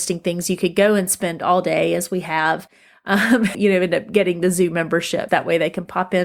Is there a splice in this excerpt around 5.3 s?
yes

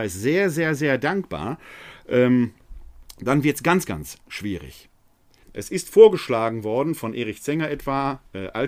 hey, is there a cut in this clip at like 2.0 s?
no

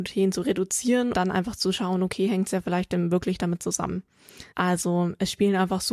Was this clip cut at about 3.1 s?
no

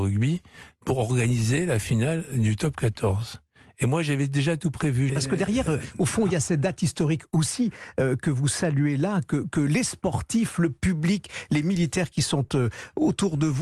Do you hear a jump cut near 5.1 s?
yes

